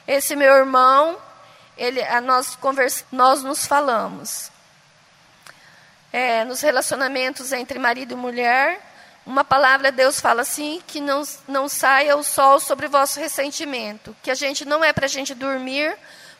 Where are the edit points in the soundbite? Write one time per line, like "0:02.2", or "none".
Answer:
0:03.0